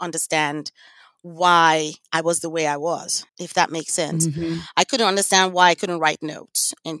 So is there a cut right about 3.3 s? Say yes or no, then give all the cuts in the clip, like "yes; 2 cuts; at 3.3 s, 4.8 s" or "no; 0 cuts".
yes; 1 cut; at 3.3 s